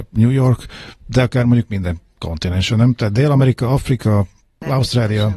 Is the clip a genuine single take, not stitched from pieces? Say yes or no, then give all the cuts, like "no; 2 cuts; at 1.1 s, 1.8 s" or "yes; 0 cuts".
yes; 0 cuts